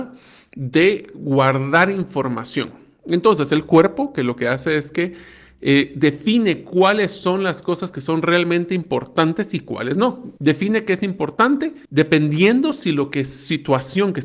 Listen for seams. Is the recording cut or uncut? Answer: cut